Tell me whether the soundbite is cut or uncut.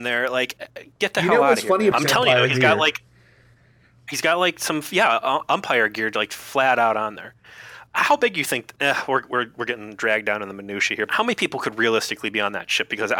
cut